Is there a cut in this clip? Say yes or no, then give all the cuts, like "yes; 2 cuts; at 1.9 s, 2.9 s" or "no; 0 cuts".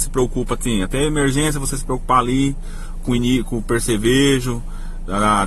no; 0 cuts